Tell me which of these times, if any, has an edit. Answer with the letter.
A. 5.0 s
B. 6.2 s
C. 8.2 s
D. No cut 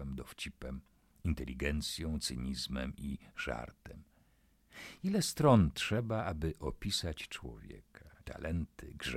C